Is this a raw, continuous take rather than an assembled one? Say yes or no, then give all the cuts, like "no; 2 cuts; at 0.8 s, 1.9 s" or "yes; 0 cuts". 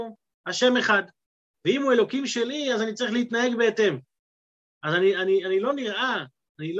no; 1 cut; at 1.5 s